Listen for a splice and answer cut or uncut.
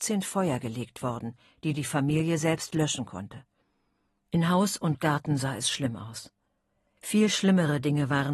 uncut